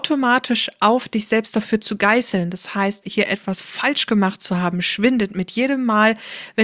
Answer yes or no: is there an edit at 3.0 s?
yes